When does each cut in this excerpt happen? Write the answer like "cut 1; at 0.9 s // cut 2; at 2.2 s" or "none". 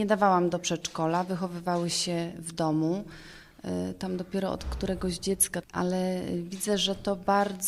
cut 1; at 5.6 s

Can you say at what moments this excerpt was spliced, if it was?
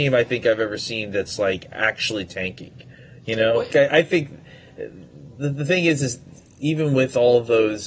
cut 1; at 3.7 s

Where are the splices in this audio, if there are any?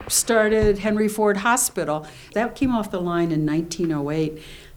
cut 1; at 2.3 s

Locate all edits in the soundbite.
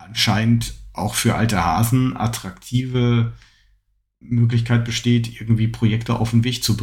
cut 1; at 4.2 s

